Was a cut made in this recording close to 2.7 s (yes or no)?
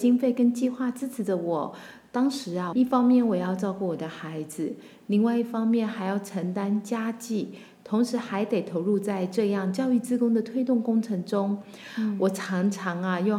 yes